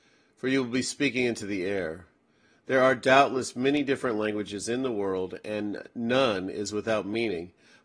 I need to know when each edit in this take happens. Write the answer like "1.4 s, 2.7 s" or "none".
none